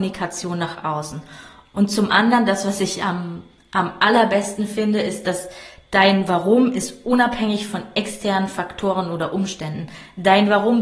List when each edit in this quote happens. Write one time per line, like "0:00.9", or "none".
none